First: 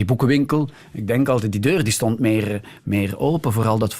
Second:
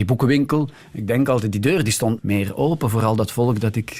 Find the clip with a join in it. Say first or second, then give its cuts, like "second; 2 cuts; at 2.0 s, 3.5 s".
second; 1 cut; at 2.2 s